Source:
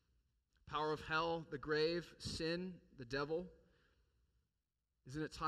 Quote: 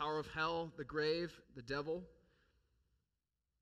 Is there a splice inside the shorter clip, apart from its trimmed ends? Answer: yes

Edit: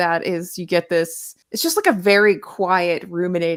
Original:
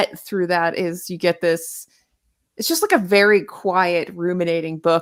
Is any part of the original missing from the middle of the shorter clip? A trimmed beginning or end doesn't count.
yes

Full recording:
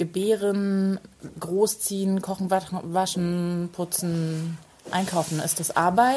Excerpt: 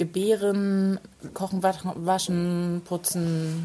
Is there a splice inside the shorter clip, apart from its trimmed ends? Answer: yes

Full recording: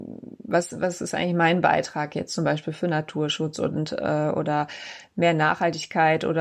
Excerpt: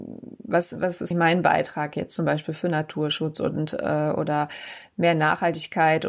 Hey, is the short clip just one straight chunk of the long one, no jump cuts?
no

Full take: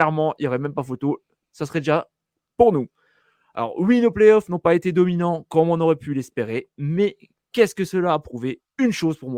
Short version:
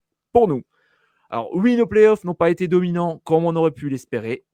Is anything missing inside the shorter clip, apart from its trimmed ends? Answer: no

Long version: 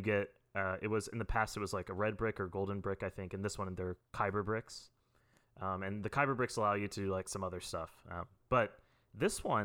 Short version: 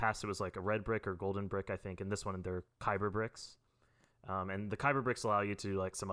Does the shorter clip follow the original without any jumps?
yes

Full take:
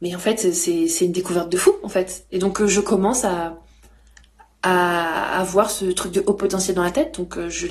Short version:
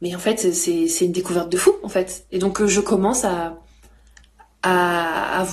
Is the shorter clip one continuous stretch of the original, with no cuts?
yes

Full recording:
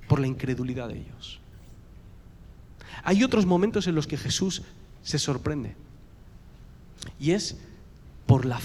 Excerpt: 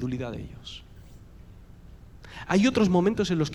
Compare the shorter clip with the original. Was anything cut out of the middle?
no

